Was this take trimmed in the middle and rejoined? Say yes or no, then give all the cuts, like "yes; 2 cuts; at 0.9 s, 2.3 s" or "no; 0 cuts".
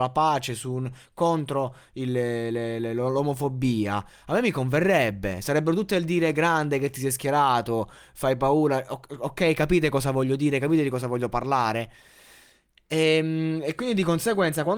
no; 0 cuts